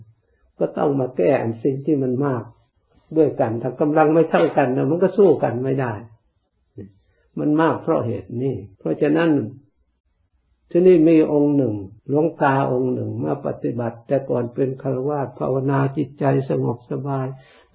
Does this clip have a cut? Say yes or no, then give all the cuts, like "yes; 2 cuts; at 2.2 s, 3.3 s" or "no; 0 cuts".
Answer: yes; 2 cuts; at 8.8 s, 12.0 s